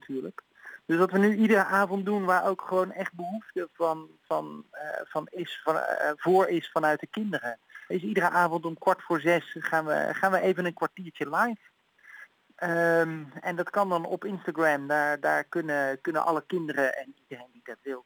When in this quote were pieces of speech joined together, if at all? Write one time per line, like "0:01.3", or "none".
0:07.9